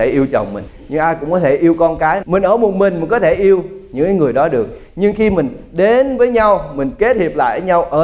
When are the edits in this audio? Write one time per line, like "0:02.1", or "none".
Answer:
0:02.2